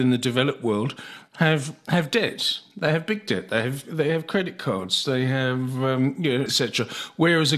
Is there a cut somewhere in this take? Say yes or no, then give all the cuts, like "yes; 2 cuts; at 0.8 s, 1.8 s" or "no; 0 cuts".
yes; 1 cut; at 6.5 s